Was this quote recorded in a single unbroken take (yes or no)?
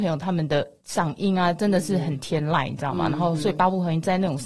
yes